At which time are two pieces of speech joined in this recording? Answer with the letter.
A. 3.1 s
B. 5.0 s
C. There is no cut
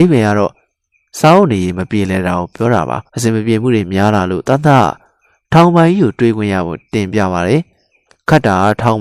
A